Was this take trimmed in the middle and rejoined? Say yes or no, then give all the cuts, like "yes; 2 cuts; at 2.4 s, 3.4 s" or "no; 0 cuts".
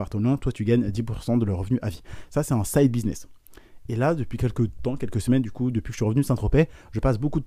no; 0 cuts